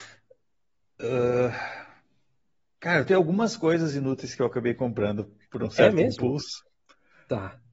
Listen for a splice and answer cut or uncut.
uncut